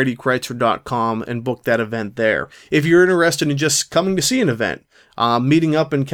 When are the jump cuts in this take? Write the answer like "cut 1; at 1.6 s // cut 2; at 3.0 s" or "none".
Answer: none